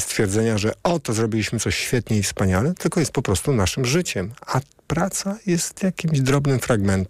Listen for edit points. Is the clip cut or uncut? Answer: uncut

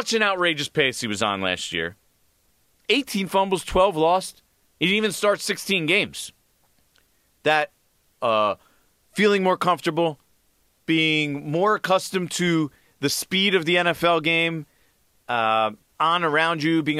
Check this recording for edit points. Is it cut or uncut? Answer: cut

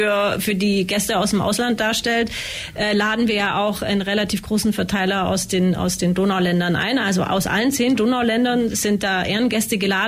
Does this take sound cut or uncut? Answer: uncut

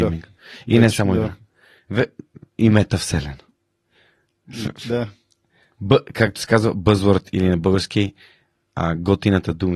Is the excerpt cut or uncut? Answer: uncut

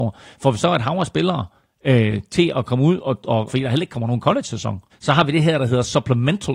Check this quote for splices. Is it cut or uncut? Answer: cut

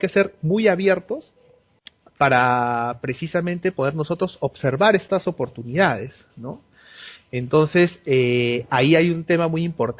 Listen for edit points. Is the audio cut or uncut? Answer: uncut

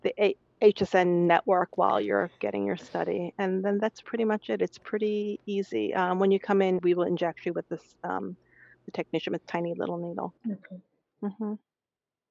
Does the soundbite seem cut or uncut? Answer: cut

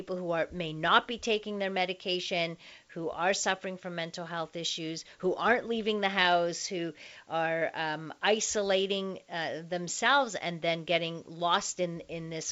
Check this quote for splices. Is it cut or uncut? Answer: uncut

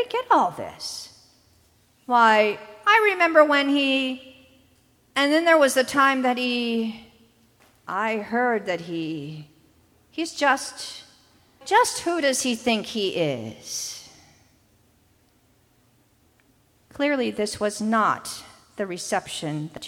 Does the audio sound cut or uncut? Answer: cut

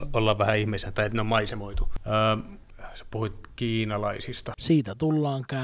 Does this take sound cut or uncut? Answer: cut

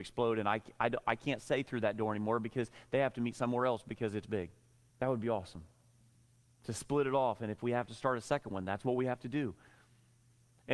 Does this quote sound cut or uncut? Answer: cut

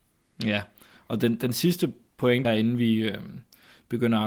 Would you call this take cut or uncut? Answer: cut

